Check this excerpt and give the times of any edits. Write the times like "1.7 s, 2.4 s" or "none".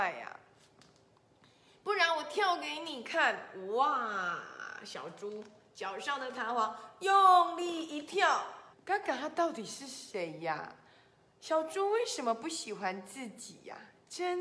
8.7 s